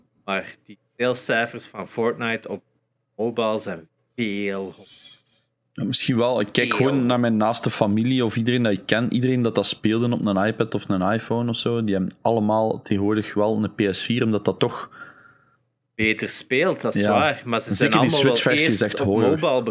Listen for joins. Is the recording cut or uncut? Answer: uncut